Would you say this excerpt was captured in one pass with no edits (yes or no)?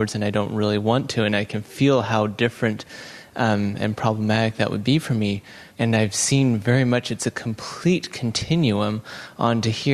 no